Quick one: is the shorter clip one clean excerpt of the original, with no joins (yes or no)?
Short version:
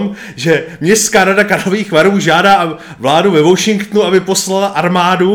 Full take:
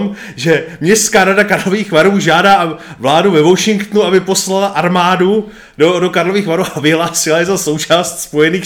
yes